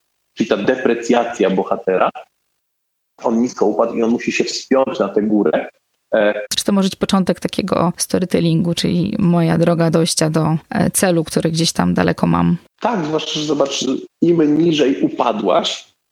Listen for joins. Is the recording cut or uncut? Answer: cut